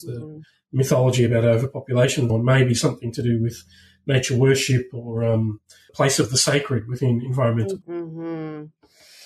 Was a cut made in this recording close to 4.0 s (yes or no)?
no